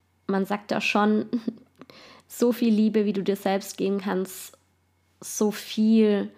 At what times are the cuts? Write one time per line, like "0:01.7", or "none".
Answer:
none